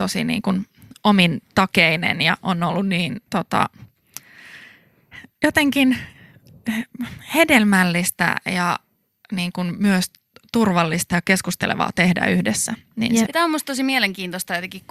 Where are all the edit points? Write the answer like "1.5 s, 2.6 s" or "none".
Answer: 3.3 s, 13.2 s